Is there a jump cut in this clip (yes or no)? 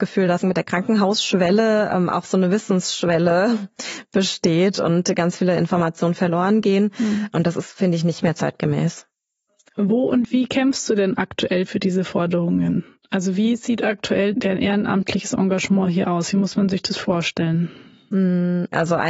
no